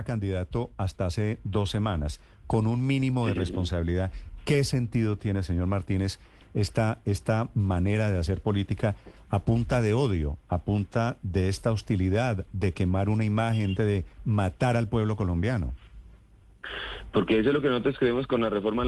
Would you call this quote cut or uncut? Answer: cut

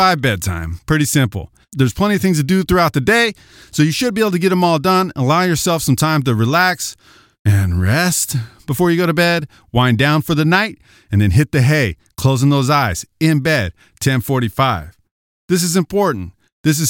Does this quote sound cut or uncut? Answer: uncut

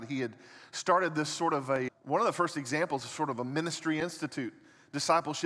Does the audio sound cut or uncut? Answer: cut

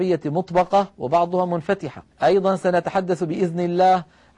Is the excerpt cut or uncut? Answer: cut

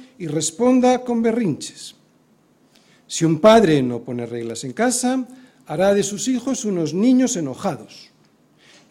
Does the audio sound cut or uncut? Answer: uncut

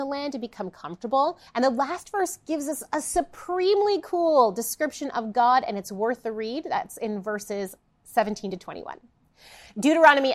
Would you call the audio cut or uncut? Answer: cut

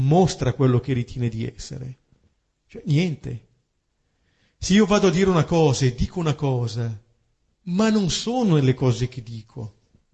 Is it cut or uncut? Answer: uncut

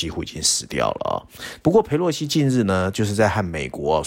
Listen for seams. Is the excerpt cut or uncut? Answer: cut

